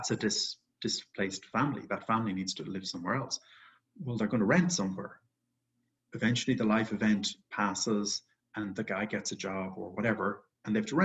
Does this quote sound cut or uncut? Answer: uncut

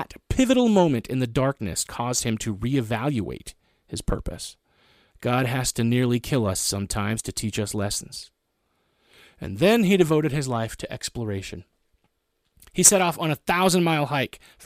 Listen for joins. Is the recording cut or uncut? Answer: cut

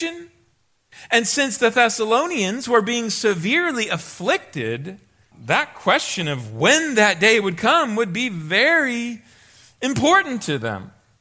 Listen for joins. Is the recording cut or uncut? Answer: cut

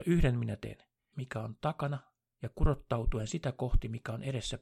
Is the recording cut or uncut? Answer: cut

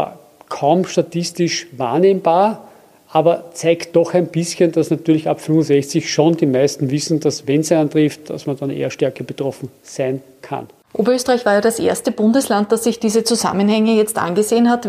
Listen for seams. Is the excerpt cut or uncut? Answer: uncut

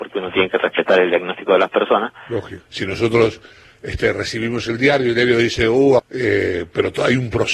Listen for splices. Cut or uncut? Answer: cut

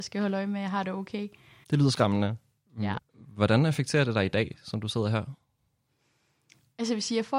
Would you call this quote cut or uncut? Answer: cut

